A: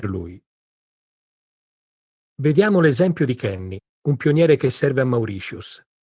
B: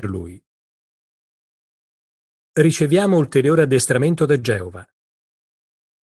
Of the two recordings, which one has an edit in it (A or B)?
A